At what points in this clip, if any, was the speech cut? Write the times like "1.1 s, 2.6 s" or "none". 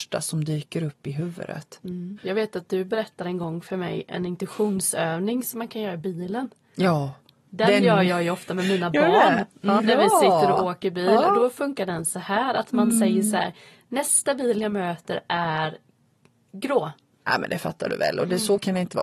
2.2 s, 9.8 s, 17.3 s